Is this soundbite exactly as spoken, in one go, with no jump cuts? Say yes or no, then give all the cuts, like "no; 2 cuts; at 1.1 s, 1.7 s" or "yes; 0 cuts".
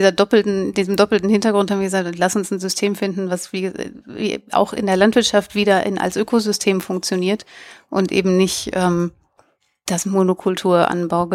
yes; 0 cuts